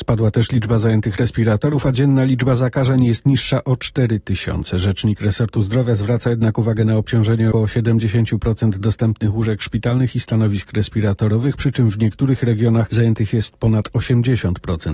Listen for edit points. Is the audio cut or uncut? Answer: cut